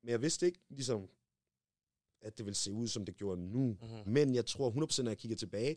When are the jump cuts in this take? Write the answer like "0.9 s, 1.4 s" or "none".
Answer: 4.1 s